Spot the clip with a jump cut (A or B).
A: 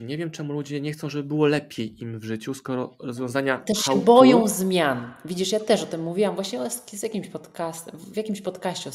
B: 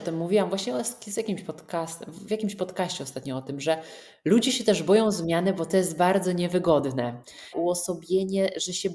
B